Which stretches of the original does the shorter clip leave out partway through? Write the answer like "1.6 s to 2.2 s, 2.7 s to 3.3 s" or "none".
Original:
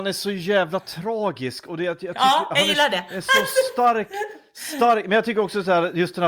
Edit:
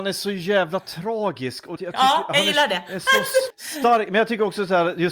1.8 s to 2.0 s, 3.7 s to 4.5 s